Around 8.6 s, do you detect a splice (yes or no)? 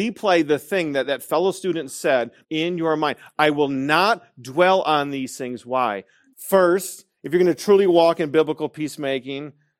no